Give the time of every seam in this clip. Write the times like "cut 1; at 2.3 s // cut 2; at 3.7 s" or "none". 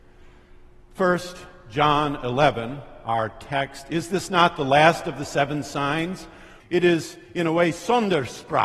cut 1; at 6.6 s